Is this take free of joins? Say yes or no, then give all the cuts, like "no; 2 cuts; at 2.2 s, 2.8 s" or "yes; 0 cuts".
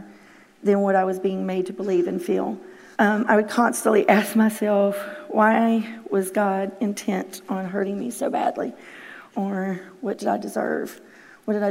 no; 2 cuts; at 2.9 s, 9.3 s